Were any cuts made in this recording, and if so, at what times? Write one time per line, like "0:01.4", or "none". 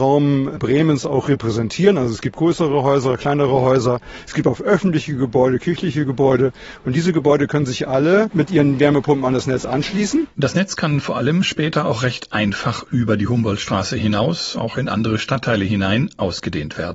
none

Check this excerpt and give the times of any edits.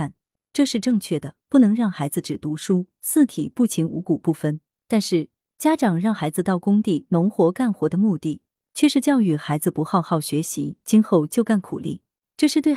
none

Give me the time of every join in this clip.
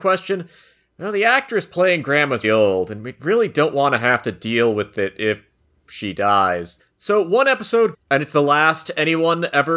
0:02.4
0:06.8
0:07.9

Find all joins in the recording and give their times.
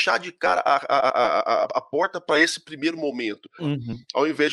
0:03.6

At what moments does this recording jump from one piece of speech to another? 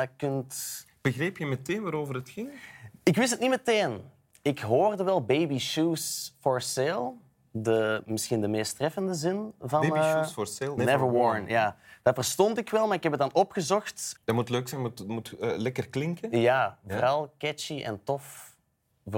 0:10.8
0:14.2

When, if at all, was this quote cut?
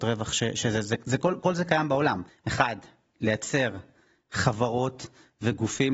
0:02.3

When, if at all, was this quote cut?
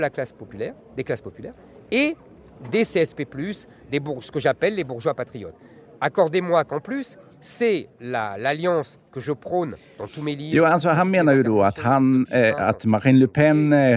none

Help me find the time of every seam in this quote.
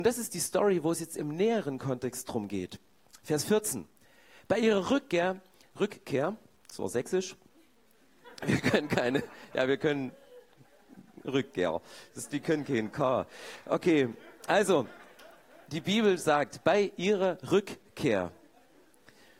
none

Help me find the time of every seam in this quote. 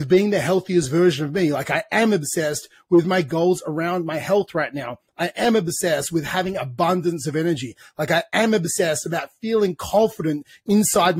none

